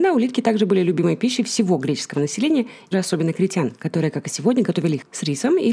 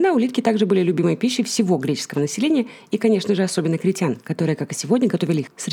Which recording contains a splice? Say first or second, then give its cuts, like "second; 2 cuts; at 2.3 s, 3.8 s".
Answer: first; 1 cut; at 2.9 s